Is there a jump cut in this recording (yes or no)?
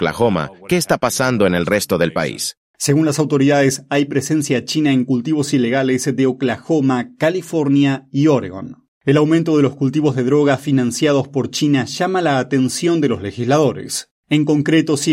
no